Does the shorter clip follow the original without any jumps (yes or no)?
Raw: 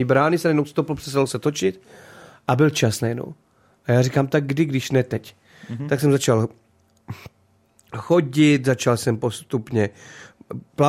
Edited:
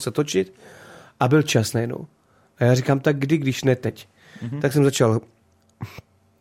yes